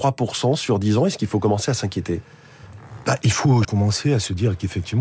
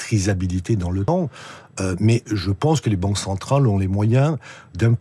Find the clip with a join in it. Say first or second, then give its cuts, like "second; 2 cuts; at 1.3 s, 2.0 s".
first; 1 cut; at 3.6 s